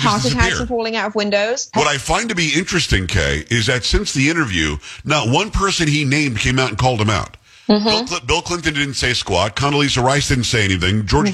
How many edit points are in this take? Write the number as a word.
one